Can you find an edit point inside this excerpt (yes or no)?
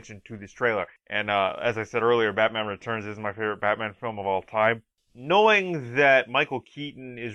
yes